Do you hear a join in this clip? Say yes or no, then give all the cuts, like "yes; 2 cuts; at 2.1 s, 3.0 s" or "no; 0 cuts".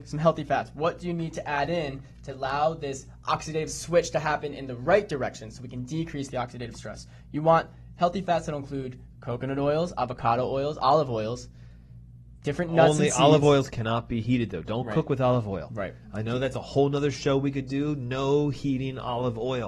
no; 0 cuts